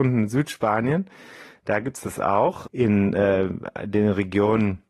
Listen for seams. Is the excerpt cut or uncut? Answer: cut